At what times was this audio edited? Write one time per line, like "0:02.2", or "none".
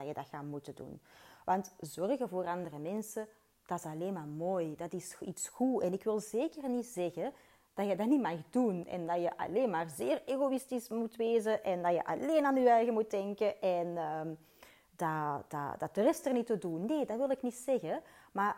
none